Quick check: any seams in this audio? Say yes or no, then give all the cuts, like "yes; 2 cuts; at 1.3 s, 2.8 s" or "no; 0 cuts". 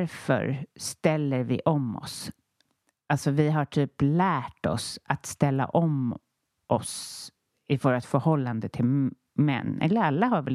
no; 0 cuts